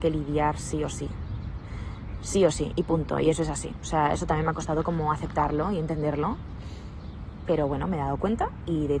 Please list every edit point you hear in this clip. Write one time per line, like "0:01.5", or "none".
none